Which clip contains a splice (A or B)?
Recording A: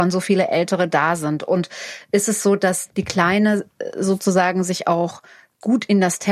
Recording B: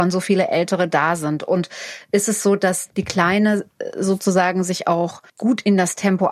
B